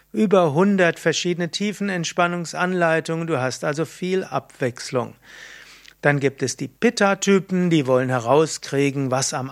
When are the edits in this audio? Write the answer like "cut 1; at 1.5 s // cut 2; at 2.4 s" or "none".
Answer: none